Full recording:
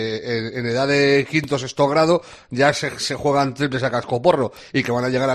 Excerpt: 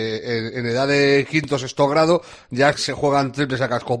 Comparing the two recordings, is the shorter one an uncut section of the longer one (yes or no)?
no